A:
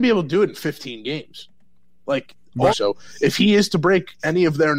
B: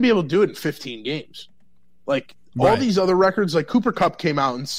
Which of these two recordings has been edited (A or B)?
A